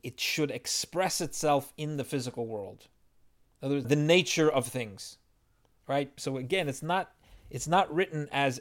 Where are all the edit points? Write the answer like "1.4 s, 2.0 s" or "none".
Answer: 3.8 s, 6.2 s